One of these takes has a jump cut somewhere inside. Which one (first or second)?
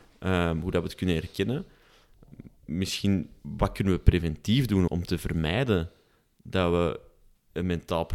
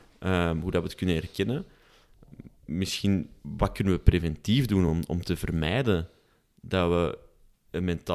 first